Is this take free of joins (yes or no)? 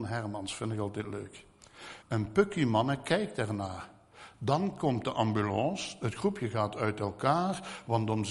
no